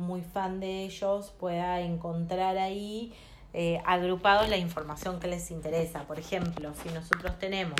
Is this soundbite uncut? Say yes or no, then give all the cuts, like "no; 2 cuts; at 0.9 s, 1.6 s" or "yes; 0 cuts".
yes; 0 cuts